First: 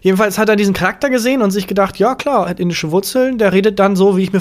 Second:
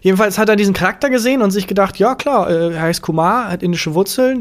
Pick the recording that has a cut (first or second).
first